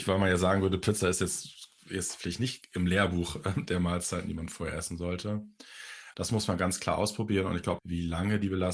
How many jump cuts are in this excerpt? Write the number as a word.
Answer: two